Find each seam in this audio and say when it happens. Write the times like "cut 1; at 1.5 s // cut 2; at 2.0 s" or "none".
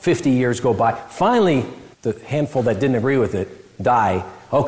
cut 1; at 1.9 s